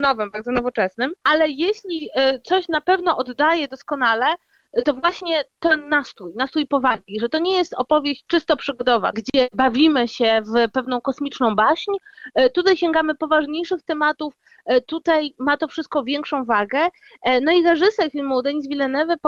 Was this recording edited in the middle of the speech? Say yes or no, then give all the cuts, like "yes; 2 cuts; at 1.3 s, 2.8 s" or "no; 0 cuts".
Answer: yes; 2 cuts; at 1.2 s, 9.1 s